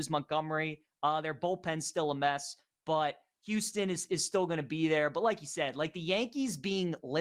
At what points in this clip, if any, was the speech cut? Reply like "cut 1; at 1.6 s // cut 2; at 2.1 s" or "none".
none